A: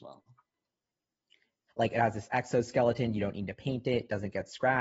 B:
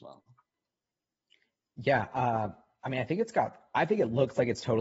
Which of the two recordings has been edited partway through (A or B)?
A